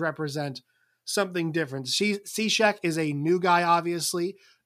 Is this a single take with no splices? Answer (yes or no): yes